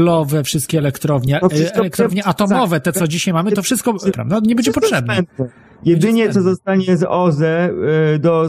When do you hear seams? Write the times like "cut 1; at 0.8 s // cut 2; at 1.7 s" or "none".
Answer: cut 1; at 4.1 s